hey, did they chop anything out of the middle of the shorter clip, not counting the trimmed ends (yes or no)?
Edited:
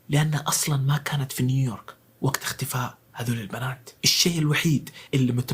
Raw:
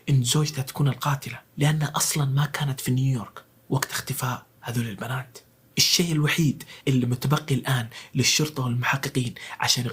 yes